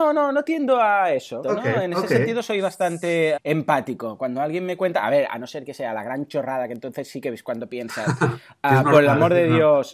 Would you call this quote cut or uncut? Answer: cut